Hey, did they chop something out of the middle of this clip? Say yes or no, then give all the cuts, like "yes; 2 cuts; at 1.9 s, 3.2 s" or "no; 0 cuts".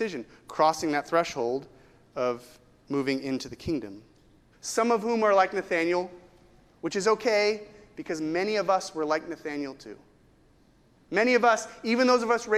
yes; 1 cut; at 4.5 s